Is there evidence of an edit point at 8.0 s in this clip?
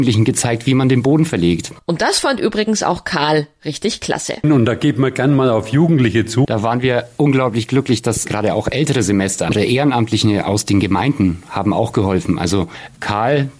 no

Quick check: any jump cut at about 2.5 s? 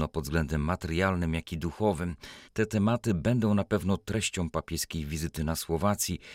yes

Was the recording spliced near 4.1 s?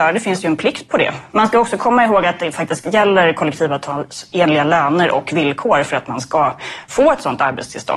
no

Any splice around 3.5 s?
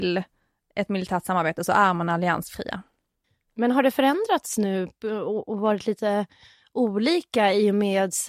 yes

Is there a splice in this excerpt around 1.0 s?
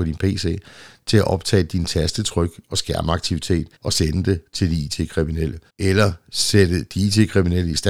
no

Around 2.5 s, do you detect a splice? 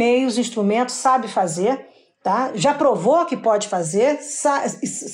no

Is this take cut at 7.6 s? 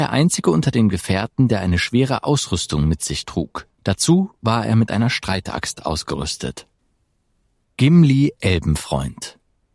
yes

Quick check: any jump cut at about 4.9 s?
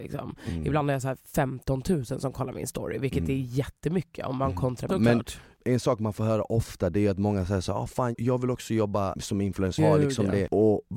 yes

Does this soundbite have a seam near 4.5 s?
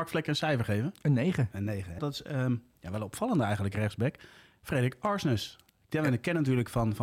no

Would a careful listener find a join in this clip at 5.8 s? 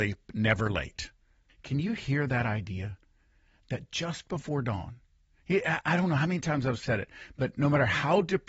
no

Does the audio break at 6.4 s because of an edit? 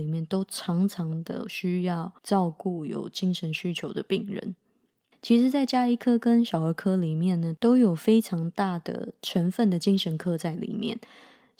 no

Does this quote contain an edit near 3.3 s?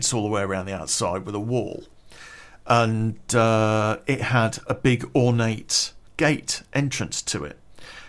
no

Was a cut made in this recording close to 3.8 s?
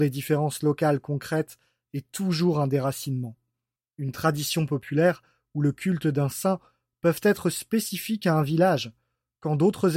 yes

